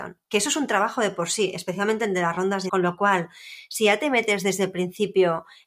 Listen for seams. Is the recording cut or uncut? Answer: cut